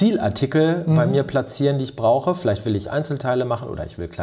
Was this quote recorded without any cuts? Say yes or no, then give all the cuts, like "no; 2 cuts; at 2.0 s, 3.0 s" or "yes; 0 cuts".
yes; 0 cuts